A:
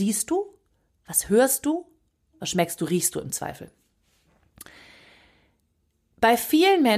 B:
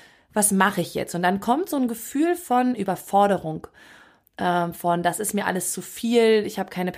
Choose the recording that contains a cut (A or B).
A